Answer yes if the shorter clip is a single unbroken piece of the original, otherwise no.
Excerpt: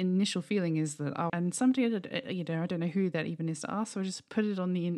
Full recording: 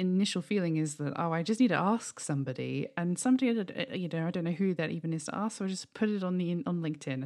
no